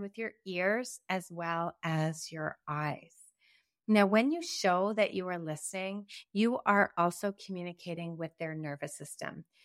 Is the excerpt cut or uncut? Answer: uncut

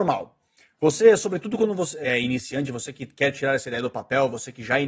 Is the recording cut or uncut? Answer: cut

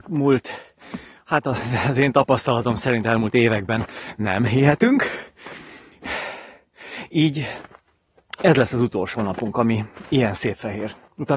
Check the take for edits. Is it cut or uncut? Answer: uncut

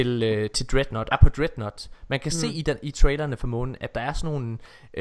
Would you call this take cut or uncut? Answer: cut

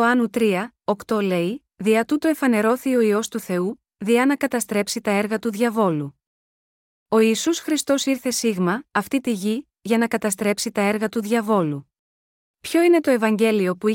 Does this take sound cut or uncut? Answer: cut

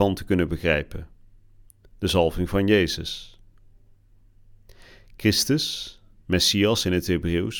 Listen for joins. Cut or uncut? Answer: uncut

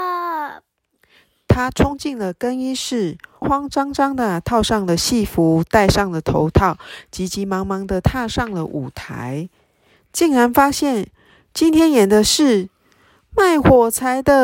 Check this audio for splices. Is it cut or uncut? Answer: cut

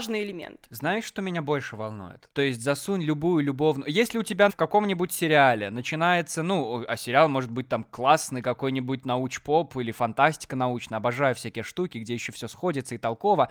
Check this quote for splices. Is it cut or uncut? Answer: cut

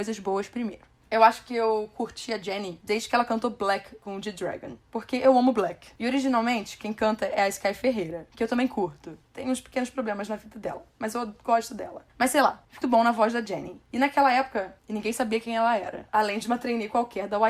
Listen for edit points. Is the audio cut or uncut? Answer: cut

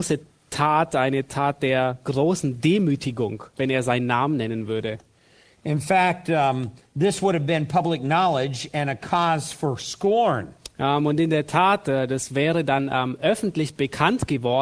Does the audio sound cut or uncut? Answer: uncut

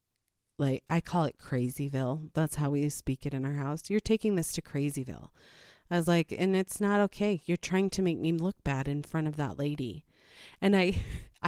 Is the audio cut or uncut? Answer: uncut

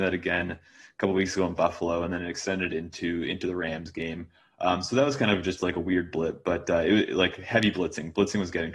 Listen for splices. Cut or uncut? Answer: uncut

